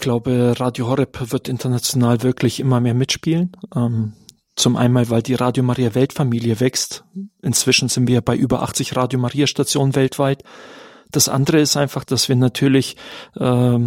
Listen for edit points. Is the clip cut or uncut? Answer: cut